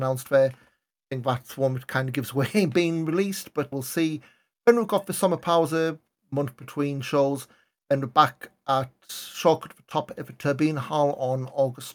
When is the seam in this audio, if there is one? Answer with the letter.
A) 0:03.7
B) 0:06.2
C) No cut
A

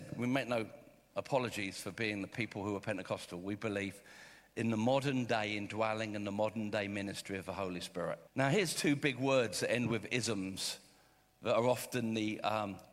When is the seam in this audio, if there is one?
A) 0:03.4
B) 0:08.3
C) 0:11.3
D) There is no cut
B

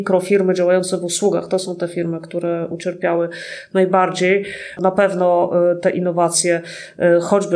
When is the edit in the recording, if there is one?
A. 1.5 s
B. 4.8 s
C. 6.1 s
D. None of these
B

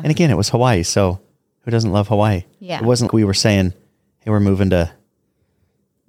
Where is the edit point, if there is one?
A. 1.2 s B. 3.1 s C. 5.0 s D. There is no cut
B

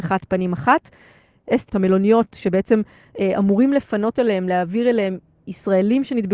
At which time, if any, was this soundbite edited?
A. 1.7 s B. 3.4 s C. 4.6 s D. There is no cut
A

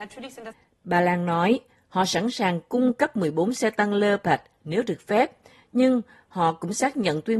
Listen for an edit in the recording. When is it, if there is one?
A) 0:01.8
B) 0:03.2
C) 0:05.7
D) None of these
D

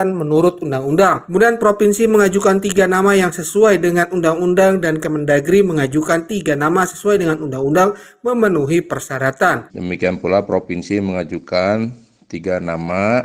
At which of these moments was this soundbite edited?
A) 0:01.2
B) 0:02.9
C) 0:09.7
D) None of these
C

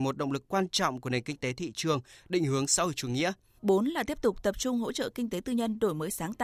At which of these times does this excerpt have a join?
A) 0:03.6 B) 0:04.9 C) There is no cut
A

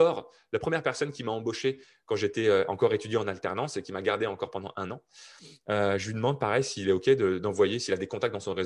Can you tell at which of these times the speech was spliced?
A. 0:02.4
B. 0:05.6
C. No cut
C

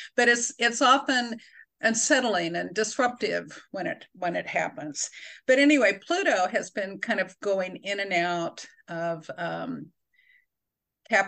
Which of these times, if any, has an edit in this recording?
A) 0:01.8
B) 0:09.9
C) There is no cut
A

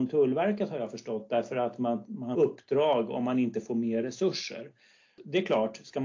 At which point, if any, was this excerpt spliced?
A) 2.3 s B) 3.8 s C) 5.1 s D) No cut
A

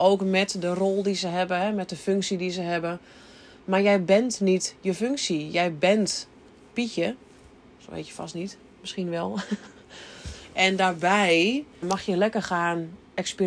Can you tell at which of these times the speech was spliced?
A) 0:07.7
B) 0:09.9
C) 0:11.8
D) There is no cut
C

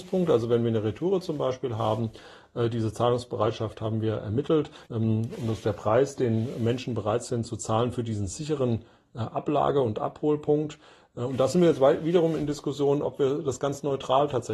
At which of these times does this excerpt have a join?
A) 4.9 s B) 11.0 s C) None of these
A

